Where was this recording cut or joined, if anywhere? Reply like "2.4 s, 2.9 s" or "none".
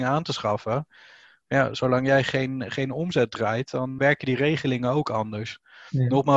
4.0 s